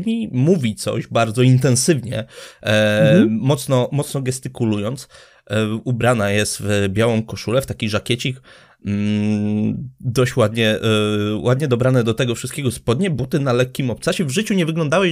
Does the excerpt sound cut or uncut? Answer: uncut